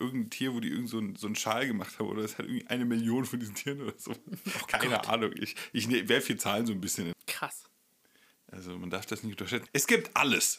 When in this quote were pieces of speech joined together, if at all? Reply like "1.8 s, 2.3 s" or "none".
7.1 s, 9.7 s